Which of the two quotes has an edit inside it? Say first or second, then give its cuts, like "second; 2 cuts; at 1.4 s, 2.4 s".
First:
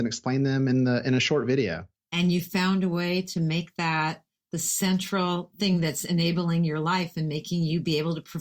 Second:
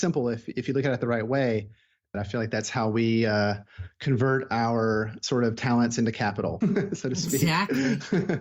second; 2 cuts; at 2.1 s, 6.6 s